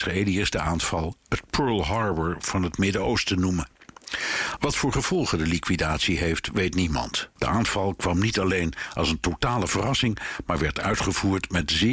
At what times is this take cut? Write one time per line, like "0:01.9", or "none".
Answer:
0:04.6
0:07.4